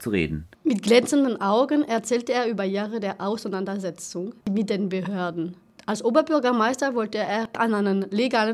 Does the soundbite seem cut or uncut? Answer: uncut